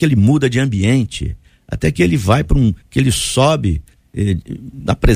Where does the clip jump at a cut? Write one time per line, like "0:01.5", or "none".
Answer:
none